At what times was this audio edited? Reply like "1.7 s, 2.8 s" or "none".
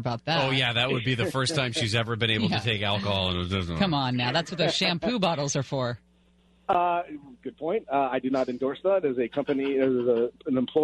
none